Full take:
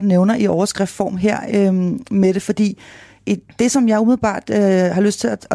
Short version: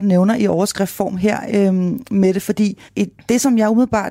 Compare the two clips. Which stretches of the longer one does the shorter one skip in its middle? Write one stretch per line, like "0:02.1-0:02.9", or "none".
0:02.9-0:03.2